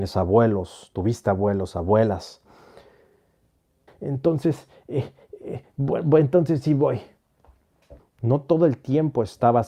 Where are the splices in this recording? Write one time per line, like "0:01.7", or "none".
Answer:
0:03.9
0:08.0